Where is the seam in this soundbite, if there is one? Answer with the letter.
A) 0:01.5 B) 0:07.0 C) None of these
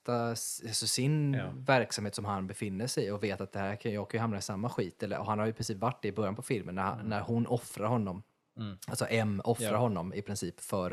C